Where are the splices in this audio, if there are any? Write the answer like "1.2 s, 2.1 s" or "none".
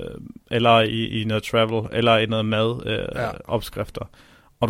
none